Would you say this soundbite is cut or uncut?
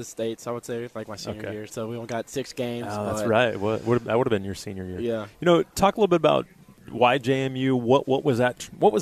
cut